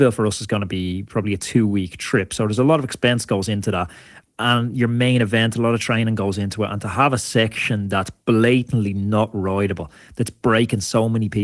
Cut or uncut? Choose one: uncut